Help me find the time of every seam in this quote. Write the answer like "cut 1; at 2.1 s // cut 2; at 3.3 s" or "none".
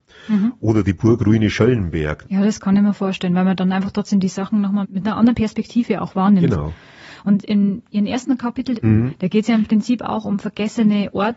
cut 1; at 2.2 s // cut 2; at 4.8 s // cut 3; at 8.8 s